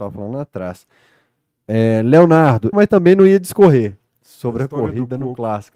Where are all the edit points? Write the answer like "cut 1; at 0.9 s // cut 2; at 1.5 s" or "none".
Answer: cut 1; at 2.7 s

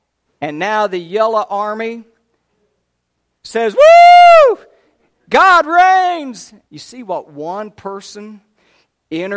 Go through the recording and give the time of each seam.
cut 1; at 6.7 s

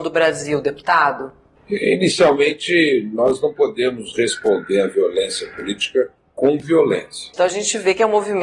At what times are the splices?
cut 1; at 7.3 s

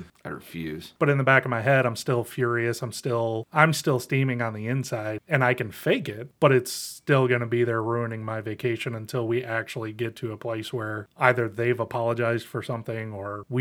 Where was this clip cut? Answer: cut 1; at 1.0 s

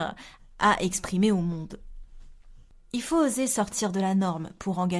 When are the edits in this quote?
none

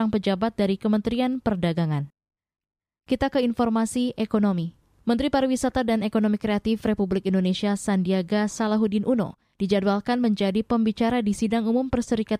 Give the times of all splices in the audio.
none

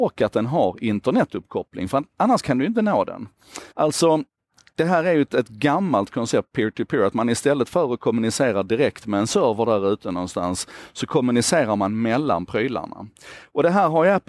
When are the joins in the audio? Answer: cut 1; at 3.7 s

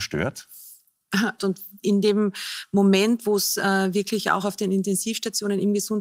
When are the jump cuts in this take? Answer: cut 1; at 1.4 s

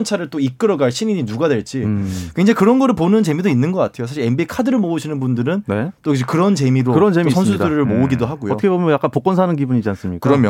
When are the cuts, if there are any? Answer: none

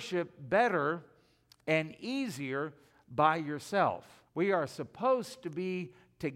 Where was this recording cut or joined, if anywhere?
cut 1; at 4.3 s

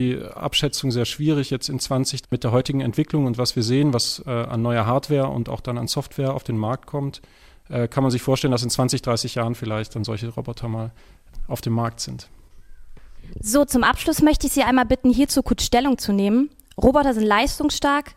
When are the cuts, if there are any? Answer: cut 1; at 2.2 s

